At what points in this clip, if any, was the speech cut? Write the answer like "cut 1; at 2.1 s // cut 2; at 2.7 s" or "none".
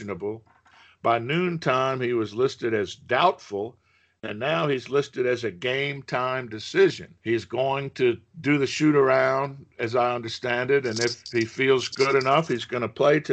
cut 1; at 7.2 s